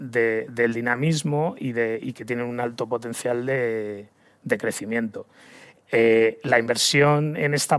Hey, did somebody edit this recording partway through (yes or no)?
no